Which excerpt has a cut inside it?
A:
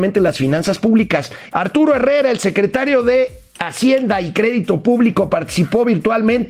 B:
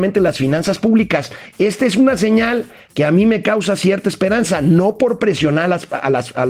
A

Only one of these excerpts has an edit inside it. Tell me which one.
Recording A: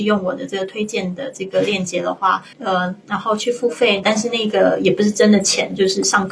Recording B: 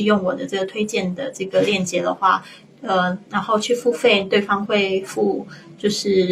A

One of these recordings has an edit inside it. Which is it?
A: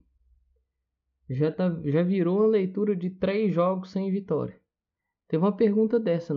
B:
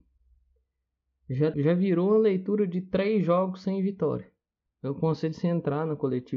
B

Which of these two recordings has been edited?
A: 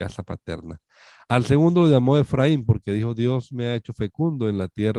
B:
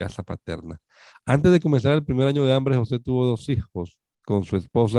B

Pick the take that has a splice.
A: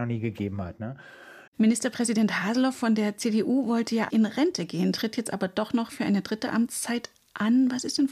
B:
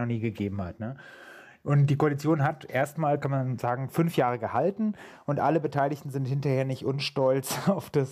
A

